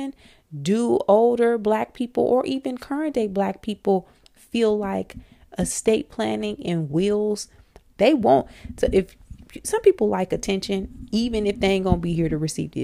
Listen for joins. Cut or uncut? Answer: cut